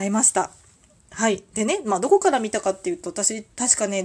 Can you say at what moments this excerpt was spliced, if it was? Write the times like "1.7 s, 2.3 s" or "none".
none